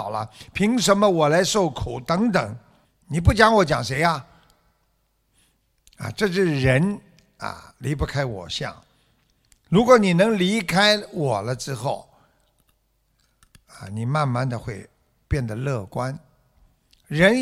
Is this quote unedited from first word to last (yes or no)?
no